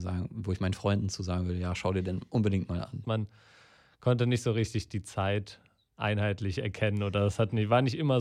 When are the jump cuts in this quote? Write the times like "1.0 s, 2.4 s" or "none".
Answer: 3.0 s